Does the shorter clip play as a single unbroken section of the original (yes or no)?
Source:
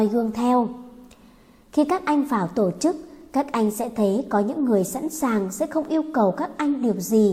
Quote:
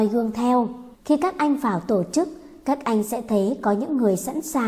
no